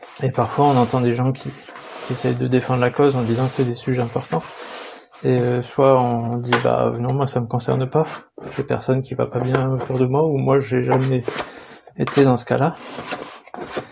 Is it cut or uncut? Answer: uncut